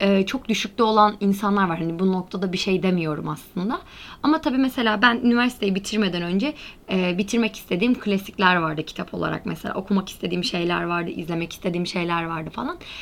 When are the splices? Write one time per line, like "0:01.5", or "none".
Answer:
none